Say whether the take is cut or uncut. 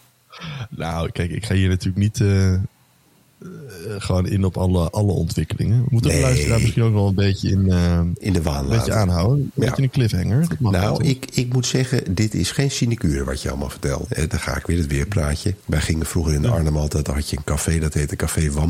cut